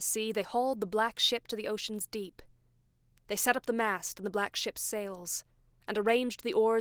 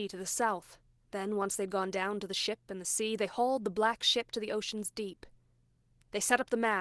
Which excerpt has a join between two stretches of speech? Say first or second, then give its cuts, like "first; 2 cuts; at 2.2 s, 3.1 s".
second; 1 cut; at 1.0 s